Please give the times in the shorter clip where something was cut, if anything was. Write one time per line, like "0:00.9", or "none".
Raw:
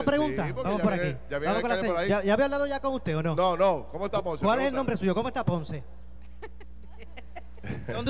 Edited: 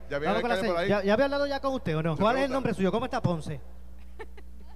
0:02.2